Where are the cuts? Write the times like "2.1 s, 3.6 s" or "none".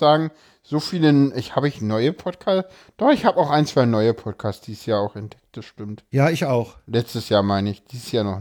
none